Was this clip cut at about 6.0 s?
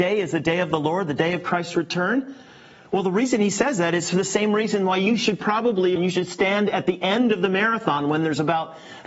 yes; 1 cut; at 6.0 s

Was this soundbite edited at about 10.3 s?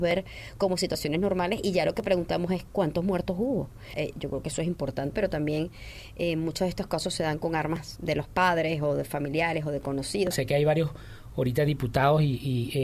yes; 3 cuts; at 3.9 s, 5.1 s, 10.3 s

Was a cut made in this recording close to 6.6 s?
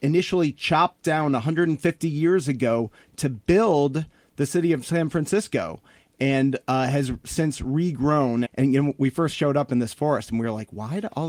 no; 1 cut; at 8.4 s

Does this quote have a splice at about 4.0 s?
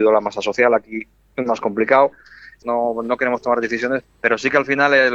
yes; 2 cuts; at 2.6 s, 4.0 s

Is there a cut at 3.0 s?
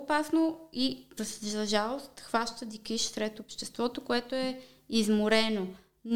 no; 1 cut; at 1.2 s

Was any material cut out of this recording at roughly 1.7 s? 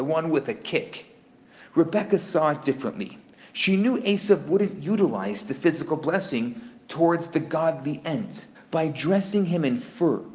no; 1 cut; at 8.5 s

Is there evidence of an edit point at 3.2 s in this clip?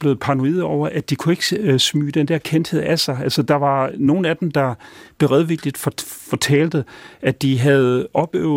no; 0 cuts

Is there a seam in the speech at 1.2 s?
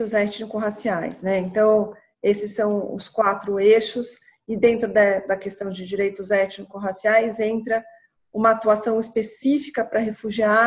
no; 0 cuts

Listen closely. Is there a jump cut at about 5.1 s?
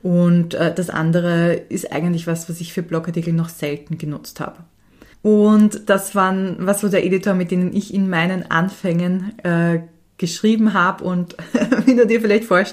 yes; 1 cut; at 5.1 s

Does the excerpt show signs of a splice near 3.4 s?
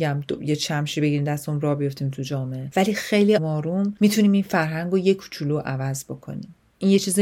yes; 1 cut; at 3.4 s

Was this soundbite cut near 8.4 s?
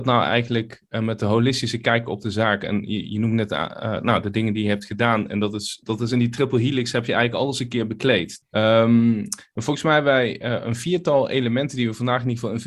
yes; 1 cut; at 8.4 s

